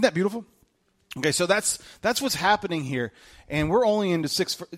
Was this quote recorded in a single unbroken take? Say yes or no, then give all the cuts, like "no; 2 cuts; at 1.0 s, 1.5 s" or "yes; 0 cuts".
yes; 0 cuts